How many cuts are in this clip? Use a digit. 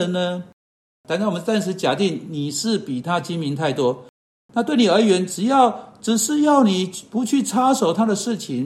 0